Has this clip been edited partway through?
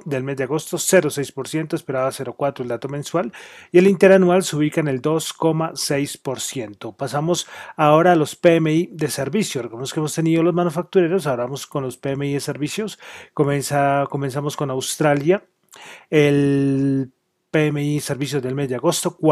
no; 0 cuts

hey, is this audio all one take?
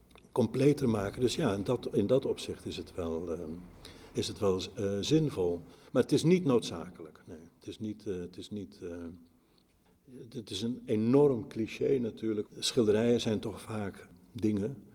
no; 2 cuts; at 4.1 s, 12.5 s

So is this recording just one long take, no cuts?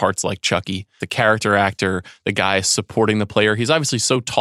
no; 1 cut; at 1.0 s

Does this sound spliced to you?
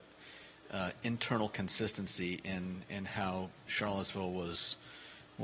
no; 0 cuts

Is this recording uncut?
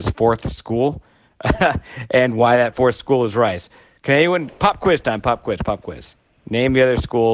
yes; 0 cuts

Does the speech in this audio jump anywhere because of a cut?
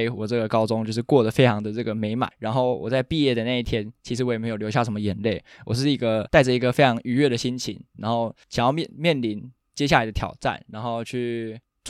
no; 0 cuts

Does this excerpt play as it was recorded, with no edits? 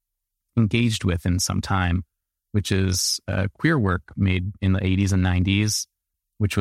yes; 0 cuts

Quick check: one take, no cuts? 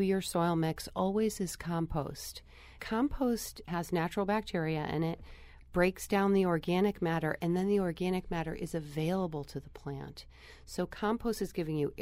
yes; 0 cuts

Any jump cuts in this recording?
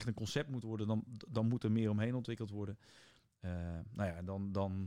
no; 0 cuts

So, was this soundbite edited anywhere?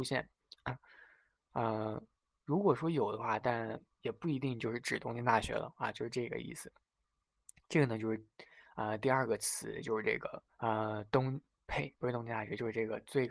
yes; 1 cut; at 10.5 s

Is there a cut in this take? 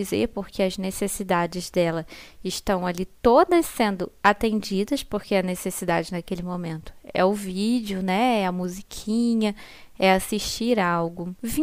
no; 0 cuts

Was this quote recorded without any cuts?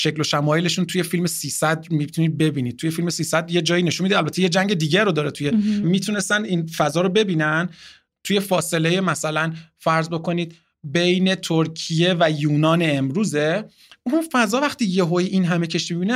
no; 1 cut; at 5.8 s

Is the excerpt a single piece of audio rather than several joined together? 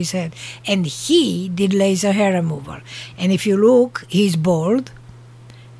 yes; 0 cuts

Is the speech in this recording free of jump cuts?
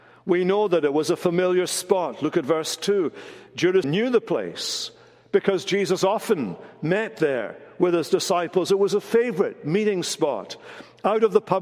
no; 1 cut; at 3.8 s

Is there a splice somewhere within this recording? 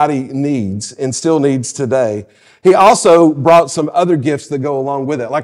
no; 0 cuts

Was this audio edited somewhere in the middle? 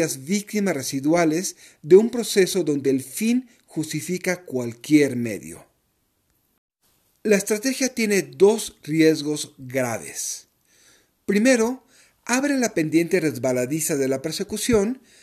no; 0 cuts

